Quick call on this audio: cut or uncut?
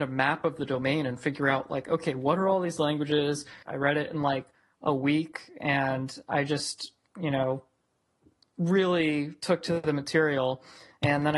cut